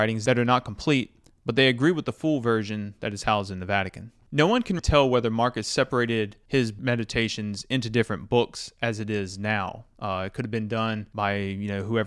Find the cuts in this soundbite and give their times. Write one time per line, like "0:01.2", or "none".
0:04.8